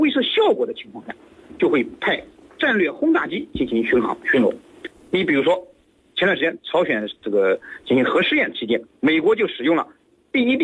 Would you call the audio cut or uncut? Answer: uncut